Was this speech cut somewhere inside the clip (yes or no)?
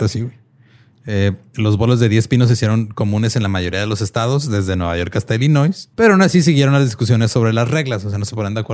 yes